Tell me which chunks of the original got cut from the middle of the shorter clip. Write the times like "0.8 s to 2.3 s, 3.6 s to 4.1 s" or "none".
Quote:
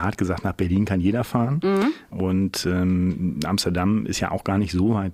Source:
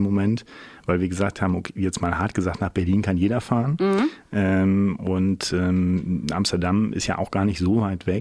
4.3 s to 5.0 s